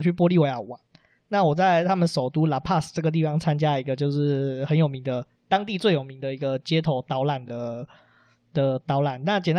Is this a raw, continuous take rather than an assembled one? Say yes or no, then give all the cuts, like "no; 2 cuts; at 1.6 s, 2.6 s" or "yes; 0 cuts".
yes; 0 cuts